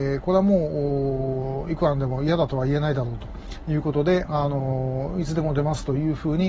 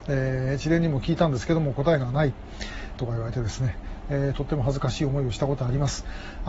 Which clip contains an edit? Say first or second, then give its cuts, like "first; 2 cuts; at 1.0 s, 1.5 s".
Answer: second; 1 cut; at 3.0 s